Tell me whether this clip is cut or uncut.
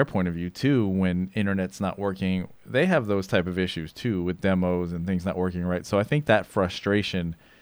uncut